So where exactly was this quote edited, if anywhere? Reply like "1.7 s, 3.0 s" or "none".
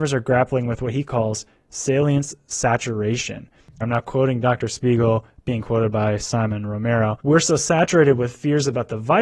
3.8 s, 7.2 s

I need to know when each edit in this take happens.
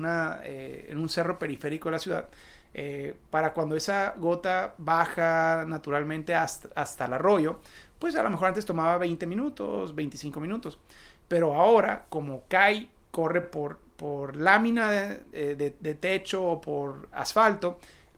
none

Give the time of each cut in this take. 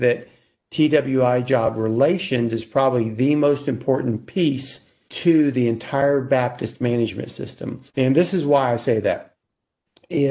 5.1 s, 7.9 s

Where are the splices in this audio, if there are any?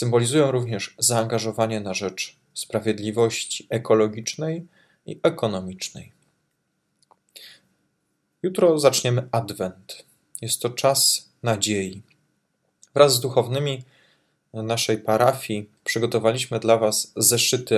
15.8 s

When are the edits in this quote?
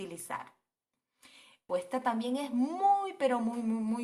1.7 s

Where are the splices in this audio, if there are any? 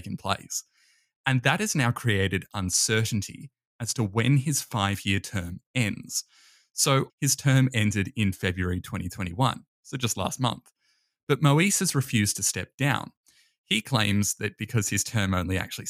7.1 s

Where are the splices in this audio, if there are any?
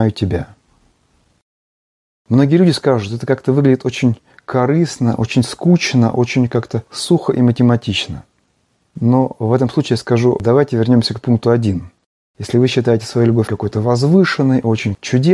13.5 s

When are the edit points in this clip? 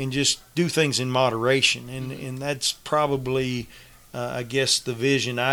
none

